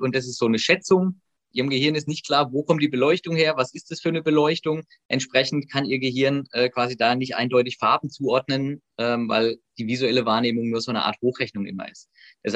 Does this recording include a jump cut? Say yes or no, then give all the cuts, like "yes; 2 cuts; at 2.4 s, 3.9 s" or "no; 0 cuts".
yes; 1 cut; at 1.5 s